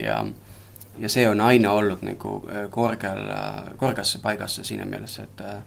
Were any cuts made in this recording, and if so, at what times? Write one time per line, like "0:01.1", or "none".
0:00.9